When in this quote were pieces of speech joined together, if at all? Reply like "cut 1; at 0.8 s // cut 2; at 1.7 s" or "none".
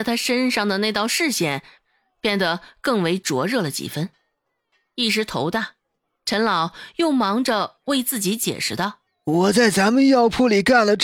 cut 1; at 9.1 s